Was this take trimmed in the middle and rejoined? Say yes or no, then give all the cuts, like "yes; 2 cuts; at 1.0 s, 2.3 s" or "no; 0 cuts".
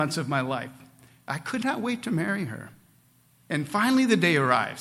no; 0 cuts